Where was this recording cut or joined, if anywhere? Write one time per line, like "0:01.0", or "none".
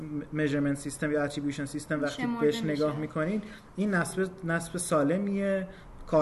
none